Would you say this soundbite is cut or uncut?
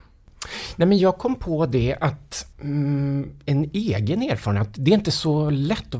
cut